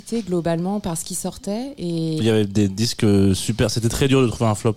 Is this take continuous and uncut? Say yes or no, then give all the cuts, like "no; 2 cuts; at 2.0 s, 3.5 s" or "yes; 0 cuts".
no; 1 cut; at 2.2 s